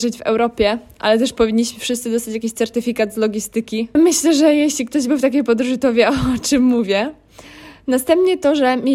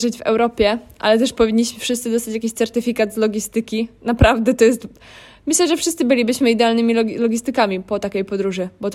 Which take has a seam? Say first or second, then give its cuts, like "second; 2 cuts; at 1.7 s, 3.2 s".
first; 1 cut; at 4.0 s